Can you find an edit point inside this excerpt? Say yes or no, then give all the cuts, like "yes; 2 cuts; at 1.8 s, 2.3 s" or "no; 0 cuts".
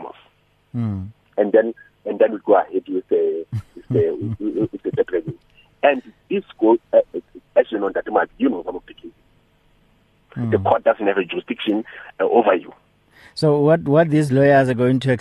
yes; 2 cuts; at 7.5 s, 10.3 s